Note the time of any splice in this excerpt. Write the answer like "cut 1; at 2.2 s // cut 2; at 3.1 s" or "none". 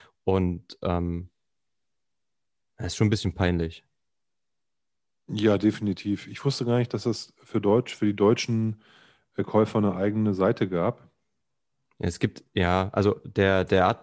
none